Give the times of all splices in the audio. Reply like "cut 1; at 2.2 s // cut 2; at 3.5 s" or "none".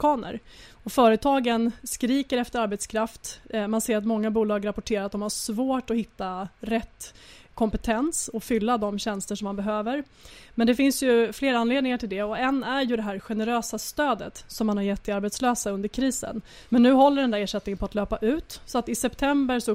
cut 1; at 16.6 s